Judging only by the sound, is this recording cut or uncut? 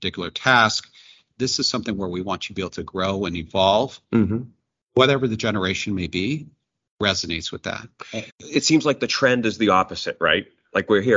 cut